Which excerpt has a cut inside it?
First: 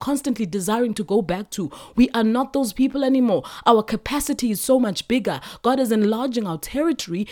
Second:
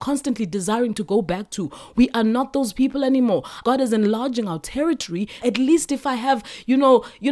second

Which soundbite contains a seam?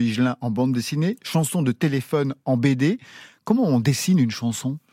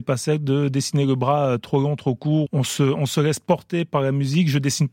second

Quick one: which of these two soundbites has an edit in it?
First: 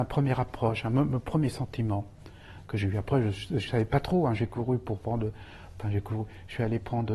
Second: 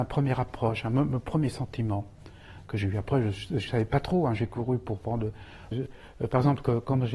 second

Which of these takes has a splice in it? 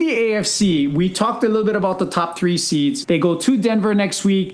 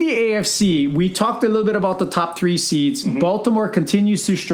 first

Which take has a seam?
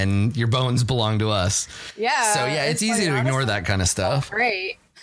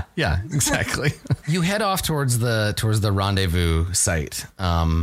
second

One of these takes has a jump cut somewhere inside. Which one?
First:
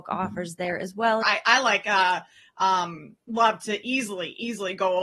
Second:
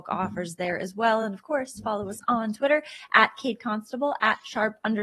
first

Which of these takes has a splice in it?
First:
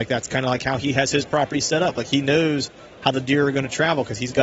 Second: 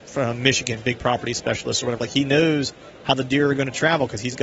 second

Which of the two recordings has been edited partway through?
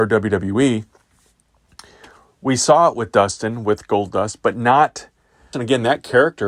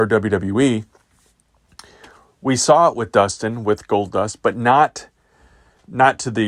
first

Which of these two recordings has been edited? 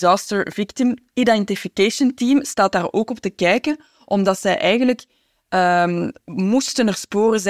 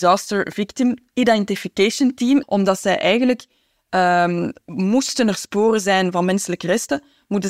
second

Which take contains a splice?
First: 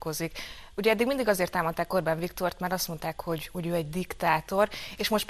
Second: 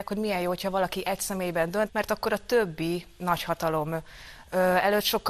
second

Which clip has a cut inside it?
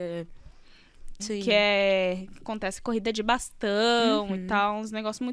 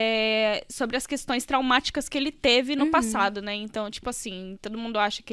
first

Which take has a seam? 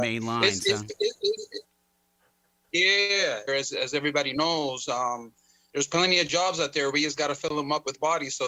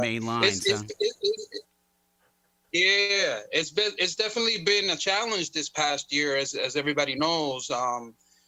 first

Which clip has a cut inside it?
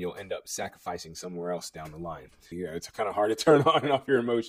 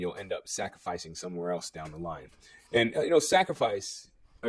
first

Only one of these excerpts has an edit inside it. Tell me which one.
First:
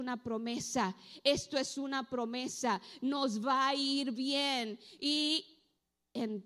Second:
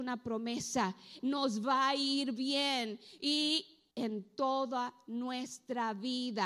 second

